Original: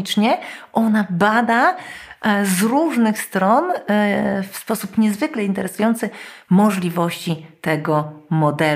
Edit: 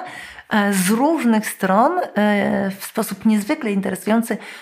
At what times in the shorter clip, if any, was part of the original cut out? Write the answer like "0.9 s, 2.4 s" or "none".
none